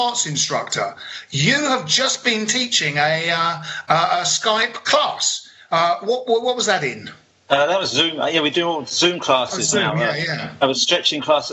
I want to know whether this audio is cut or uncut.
uncut